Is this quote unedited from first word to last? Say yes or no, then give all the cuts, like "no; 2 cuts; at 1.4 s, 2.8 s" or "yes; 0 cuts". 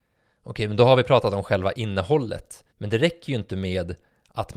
no; 1 cut; at 2.7 s